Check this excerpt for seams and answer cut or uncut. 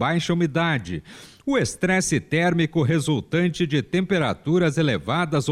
uncut